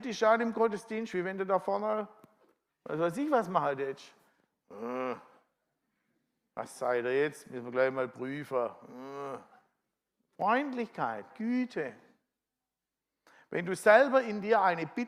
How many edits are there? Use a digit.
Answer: 1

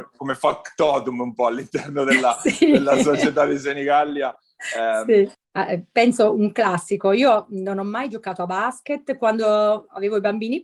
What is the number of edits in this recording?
1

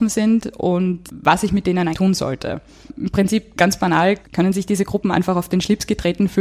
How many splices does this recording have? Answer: 1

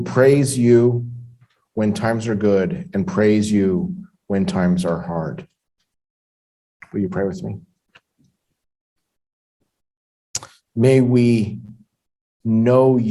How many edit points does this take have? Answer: 2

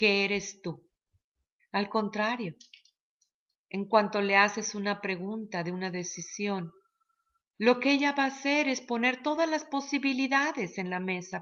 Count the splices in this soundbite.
1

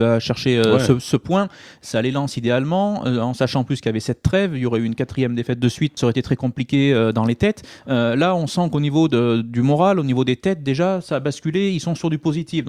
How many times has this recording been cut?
1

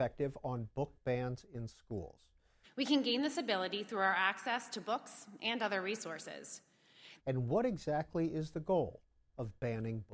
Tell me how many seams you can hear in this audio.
2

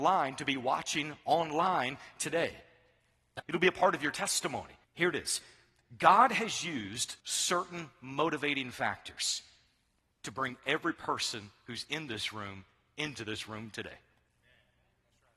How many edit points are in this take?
3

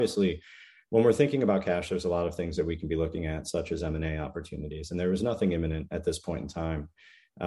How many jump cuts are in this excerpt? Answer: 0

